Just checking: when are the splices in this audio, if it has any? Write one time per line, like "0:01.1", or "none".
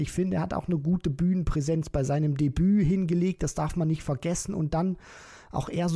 none